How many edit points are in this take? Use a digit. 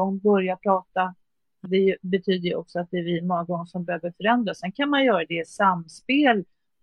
1